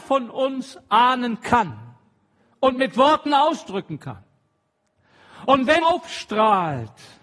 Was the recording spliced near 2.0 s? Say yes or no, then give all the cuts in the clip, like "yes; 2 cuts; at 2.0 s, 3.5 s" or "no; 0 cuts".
no; 1 cut; at 5.8 s